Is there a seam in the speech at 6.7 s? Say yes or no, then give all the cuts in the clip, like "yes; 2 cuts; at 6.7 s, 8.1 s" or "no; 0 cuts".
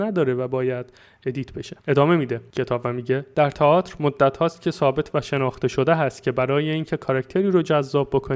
no; 1 cut; at 1.8 s